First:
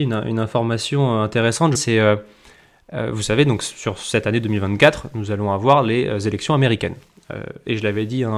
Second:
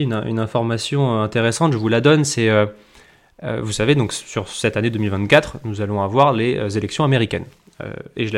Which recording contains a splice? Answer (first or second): first